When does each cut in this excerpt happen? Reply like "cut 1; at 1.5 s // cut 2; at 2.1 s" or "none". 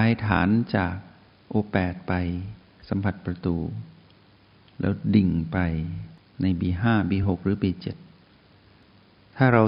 none